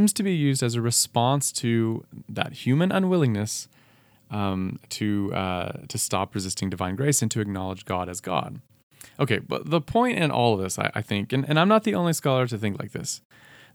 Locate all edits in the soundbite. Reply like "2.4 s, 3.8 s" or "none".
none